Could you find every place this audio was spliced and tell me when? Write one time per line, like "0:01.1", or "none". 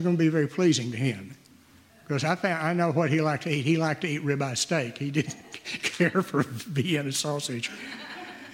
none